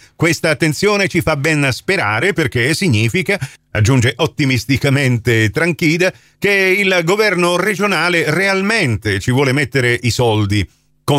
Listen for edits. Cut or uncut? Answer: uncut